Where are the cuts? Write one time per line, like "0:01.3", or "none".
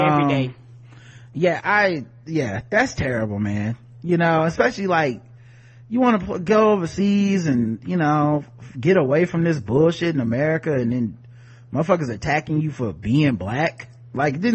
0:01.6

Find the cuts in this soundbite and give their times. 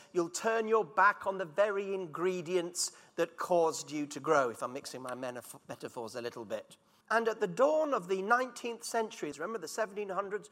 0:07.0
0:09.3

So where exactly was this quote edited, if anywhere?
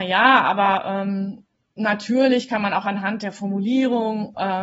none

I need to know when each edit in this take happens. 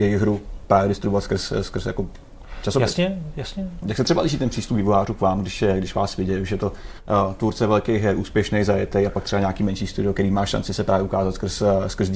0:03.8

